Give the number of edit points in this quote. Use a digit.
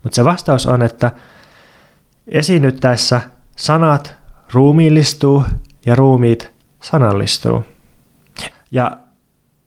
1